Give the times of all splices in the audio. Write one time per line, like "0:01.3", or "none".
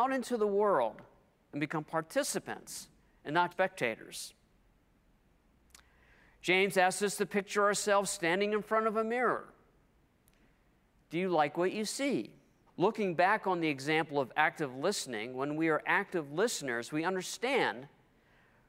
0:03.5
0:12.7